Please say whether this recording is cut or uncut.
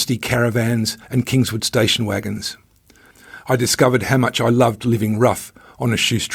cut